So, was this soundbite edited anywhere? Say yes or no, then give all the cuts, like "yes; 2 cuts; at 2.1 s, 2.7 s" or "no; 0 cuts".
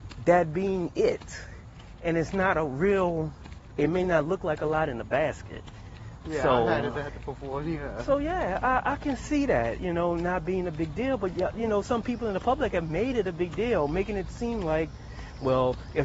no; 0 cuts